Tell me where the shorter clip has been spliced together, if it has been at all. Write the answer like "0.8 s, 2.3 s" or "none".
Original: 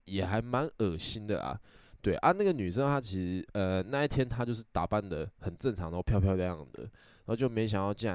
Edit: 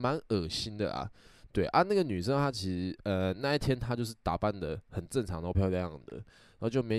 5.5 s